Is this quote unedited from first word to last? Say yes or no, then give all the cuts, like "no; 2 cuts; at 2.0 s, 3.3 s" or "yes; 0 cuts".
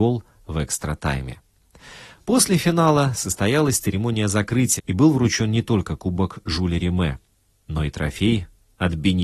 no; 1 cut; at 4.8 s